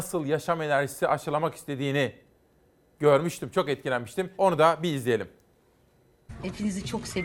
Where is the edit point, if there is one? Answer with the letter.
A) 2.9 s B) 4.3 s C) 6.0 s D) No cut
B